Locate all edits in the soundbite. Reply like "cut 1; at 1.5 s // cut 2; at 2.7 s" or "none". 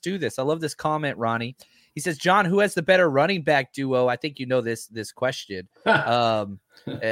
none